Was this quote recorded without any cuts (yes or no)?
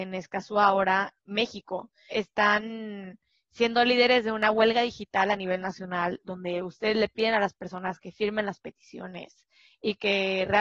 no